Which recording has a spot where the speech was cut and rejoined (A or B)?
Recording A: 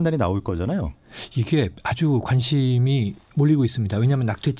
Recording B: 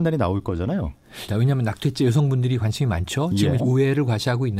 B